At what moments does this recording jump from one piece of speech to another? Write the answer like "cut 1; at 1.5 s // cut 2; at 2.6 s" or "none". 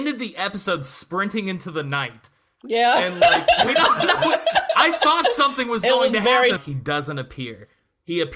cut 1; at 6.6 s